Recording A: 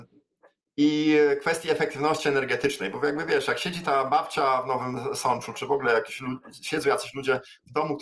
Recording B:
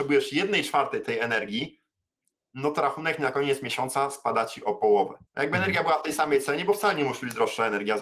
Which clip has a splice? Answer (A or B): B